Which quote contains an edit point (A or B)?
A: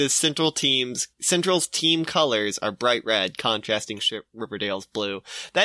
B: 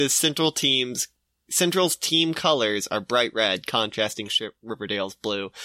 A